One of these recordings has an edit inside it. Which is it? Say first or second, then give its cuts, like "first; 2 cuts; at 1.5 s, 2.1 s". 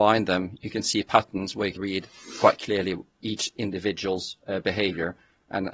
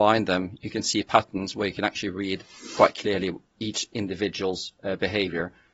first; 1 cut; at 1.8 s